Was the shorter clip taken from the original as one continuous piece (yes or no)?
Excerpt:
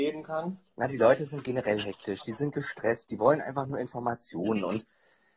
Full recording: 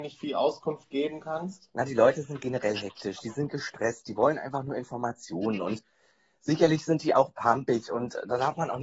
yes